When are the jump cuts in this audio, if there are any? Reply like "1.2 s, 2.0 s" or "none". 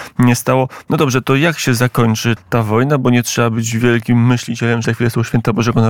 2.4 s, 4.8 s